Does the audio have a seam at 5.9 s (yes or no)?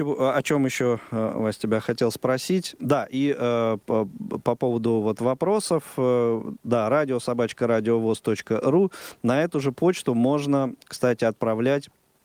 no